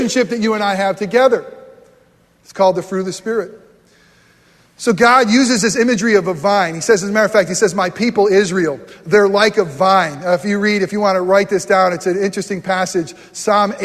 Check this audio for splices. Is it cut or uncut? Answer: uncut